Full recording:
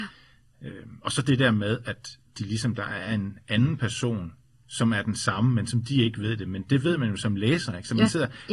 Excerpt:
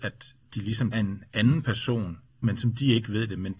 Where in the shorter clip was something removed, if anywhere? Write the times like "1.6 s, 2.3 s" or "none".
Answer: 0.9 s, 2.4 s